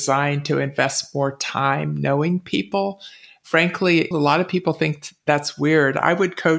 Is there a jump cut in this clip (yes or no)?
yes